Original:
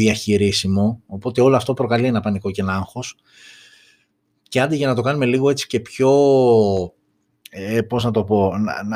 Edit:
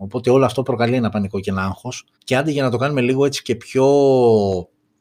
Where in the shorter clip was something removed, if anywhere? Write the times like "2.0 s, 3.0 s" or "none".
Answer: 2.1 s